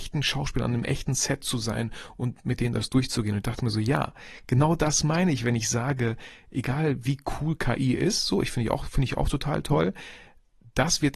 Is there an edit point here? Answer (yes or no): no